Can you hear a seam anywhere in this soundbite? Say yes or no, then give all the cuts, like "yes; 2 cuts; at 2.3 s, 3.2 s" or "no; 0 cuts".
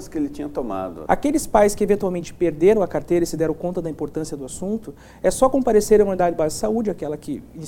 yes; 1 cut; at 1.1 s